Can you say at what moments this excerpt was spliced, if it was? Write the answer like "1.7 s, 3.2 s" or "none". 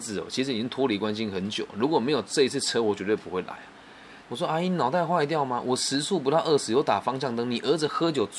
4.2 s